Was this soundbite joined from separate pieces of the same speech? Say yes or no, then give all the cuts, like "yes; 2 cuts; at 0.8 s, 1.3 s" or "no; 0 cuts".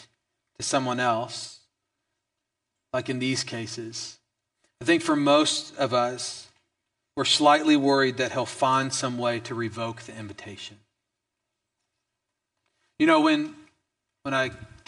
no; 0 cuts